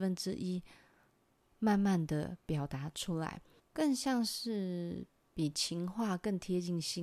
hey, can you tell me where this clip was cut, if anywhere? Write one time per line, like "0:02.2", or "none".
0:03.6